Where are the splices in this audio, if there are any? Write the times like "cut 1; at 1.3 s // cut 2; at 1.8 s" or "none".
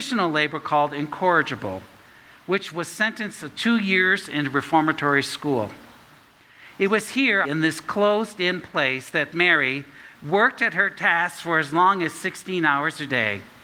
cut 1; at 7.4 s // cut 2; at 10.1 s